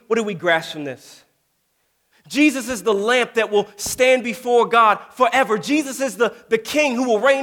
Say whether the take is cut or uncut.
cut